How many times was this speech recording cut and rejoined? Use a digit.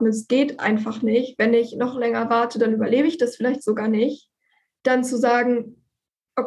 0